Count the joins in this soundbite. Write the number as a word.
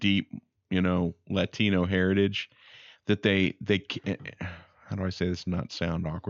zero